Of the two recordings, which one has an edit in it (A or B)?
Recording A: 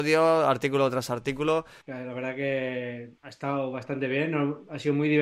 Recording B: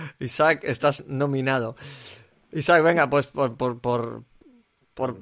A